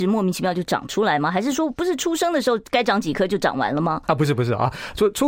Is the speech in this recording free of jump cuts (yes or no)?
yes